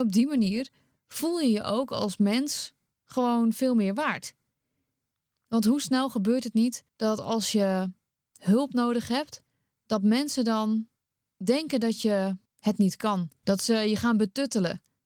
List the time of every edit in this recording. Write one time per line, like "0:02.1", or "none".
0:06.9
0:13.4